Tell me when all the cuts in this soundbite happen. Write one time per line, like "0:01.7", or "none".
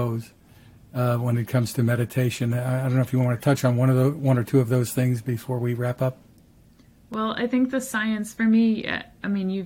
none